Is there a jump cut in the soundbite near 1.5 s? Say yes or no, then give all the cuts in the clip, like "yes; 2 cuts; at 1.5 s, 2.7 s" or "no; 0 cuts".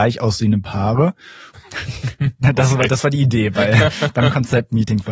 yes; 1 cut; at 1.5 s